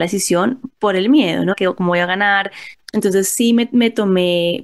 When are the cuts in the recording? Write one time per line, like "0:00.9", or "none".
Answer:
0:01.5
0:02.8